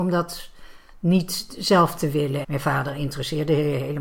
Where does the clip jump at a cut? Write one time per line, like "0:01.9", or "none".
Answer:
0:02.4